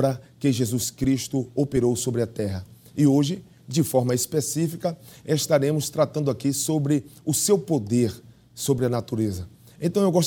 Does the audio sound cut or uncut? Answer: uncut